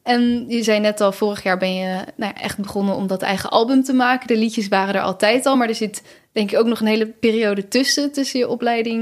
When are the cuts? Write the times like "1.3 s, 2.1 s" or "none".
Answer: none